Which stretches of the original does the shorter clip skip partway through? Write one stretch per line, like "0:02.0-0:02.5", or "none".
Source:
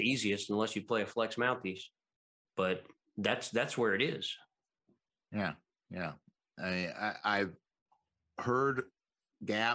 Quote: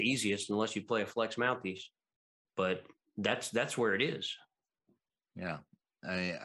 0:05.2-0:05.7